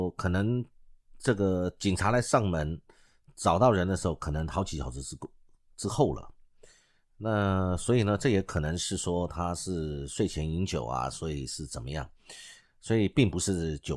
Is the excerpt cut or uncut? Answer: uncut